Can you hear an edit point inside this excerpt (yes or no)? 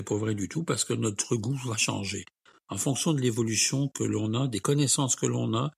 no